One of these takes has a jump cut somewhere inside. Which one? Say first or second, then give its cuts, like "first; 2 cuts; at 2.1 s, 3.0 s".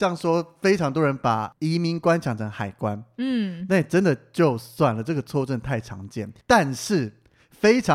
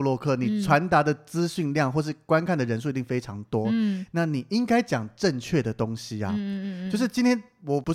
first; 1 cut; at 6.4 s